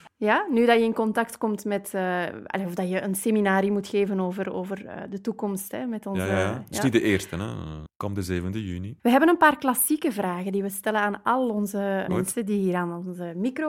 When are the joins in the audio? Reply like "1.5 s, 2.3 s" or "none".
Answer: 7.9 s, 9.0 s, 12.1 s